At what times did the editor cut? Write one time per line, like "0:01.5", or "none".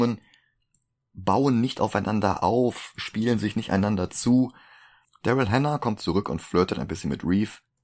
0:05.0